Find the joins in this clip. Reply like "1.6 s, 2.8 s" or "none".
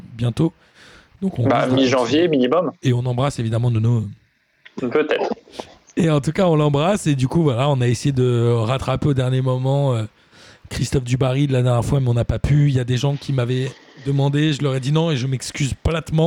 2.8 s, 4.8 s